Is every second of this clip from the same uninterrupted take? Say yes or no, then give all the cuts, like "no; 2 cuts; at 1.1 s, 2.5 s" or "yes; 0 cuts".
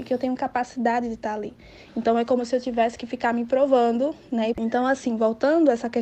no; 1 cut; at 4.5 s